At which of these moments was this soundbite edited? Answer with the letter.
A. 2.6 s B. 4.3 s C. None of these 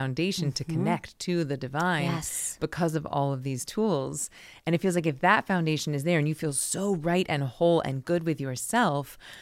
C